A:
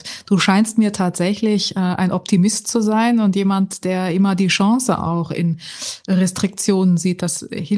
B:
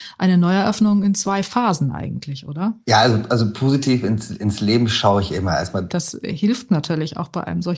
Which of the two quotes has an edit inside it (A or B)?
B